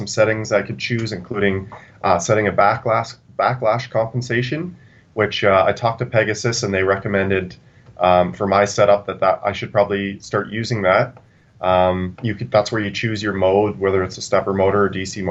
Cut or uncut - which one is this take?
uncut